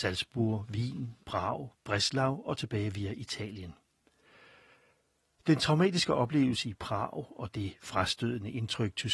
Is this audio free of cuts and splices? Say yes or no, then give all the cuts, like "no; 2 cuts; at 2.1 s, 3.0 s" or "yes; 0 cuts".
yes; 0 cuts